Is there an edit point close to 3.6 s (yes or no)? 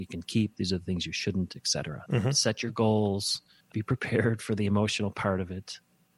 yes